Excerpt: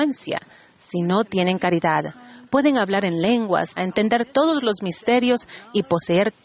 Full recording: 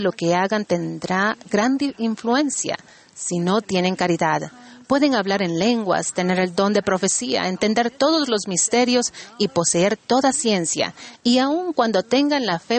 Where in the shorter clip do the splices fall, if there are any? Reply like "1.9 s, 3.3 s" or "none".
3.8 s